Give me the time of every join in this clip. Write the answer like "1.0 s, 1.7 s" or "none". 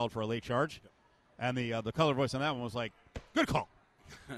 none